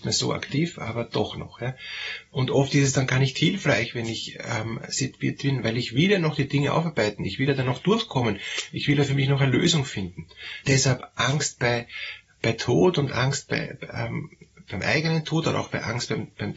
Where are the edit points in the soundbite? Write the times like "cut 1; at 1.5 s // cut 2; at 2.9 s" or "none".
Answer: cut 1; at 10.6 s